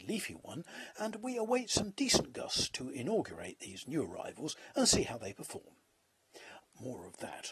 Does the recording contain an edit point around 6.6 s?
yes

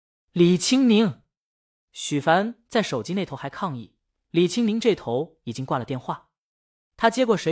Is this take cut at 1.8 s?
no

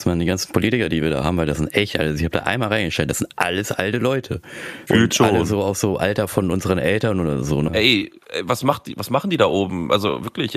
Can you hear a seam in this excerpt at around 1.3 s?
no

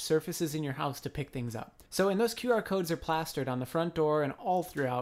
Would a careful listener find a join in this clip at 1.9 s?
yes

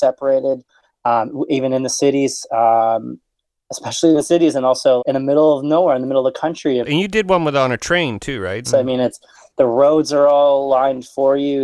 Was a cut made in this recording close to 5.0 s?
yes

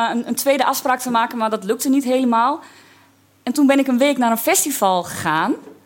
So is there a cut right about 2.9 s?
no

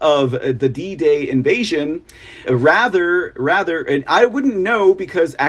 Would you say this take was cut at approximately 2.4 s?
yes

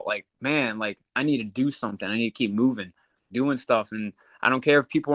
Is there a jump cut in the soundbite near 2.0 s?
no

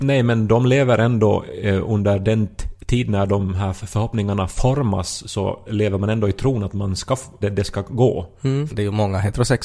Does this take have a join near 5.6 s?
yes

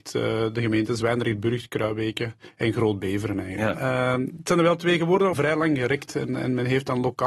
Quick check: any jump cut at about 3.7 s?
yes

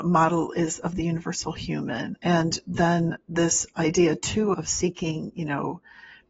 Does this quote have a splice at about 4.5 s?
yes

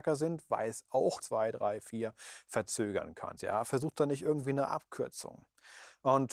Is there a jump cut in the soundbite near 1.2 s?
yes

